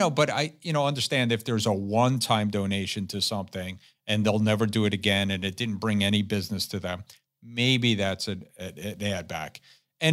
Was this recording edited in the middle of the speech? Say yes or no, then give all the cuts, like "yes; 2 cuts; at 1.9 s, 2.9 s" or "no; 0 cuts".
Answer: no; 0 cuts